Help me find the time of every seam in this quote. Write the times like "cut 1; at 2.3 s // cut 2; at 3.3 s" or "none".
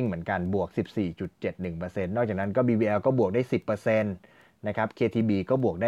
none